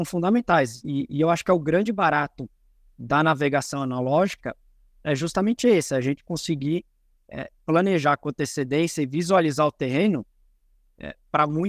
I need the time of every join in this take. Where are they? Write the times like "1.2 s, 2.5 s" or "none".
none